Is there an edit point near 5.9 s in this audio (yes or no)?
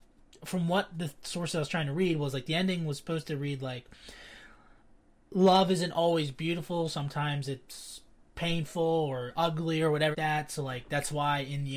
no